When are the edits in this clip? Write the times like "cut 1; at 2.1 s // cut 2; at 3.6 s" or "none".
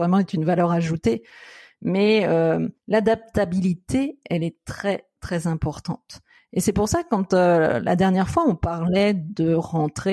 cut 1; at 2.8 s